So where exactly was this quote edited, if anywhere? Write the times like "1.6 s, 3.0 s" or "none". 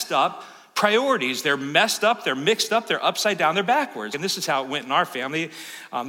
4.1 s